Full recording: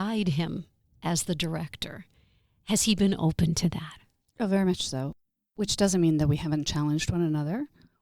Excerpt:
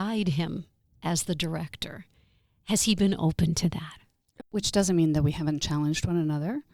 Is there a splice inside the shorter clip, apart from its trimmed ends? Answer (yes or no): yes